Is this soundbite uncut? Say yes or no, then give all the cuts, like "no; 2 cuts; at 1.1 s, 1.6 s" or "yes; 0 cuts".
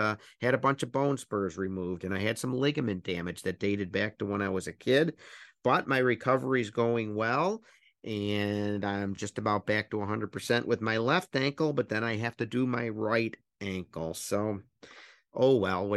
yes; 0 cuts